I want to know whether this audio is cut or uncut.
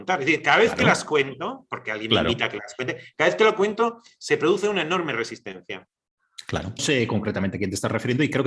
cut